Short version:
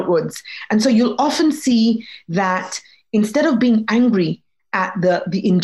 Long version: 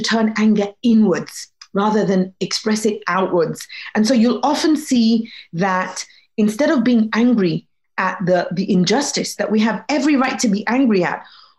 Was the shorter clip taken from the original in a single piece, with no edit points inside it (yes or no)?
yes